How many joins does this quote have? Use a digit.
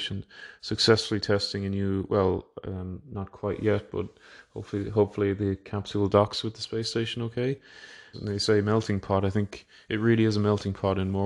1